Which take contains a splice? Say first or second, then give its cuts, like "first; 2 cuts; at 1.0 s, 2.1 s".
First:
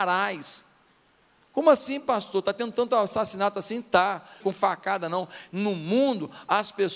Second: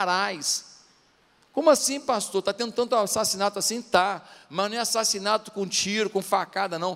first; 2 cuts; at 4.4 s, 5.5 s